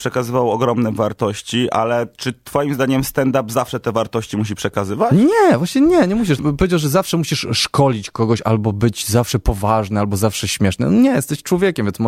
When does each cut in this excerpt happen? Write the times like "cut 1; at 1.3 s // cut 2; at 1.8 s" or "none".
cut 1; at 6.4 s // cut 2; at 8.4 s